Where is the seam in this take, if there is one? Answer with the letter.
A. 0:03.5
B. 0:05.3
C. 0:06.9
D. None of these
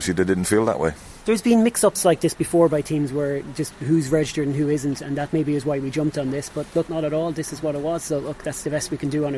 C